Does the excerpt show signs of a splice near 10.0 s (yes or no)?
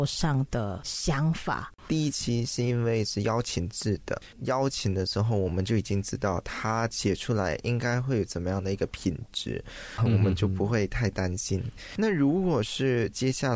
yes